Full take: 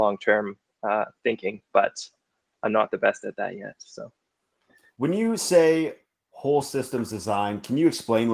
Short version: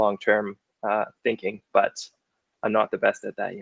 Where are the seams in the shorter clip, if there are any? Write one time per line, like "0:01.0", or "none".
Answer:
none